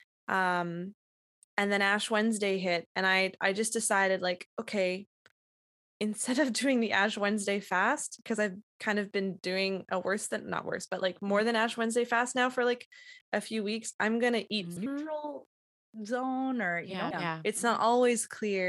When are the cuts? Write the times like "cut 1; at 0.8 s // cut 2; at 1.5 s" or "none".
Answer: cut 1; at 14.8 s // cut 2; at 17.1 s